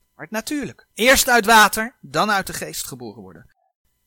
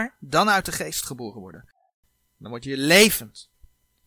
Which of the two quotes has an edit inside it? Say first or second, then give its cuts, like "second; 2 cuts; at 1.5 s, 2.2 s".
first; 1 cut; at 0.9 s